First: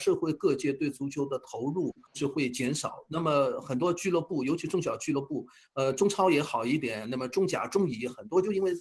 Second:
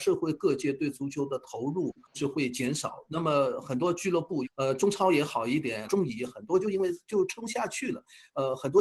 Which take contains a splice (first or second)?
second